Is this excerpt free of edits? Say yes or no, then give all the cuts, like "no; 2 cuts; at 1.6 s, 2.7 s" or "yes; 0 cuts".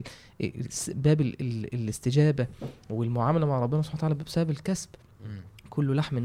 yes; 0 cuts